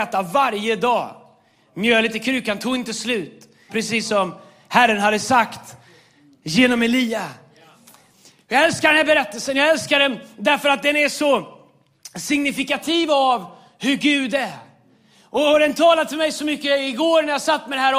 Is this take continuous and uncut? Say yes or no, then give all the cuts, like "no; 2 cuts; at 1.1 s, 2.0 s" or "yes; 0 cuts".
no; 1 cut; at 3.7 s